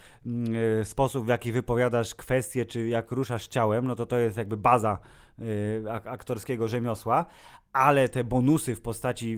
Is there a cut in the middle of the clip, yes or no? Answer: no